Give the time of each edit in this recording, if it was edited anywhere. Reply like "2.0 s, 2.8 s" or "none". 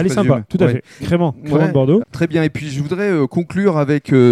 1.0 s, 2.0 s

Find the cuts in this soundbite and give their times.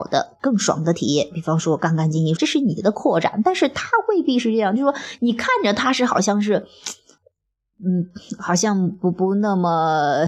2.4 s

